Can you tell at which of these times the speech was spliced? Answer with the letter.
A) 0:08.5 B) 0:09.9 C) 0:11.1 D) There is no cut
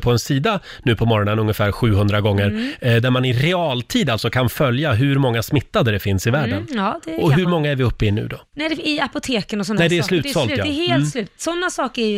A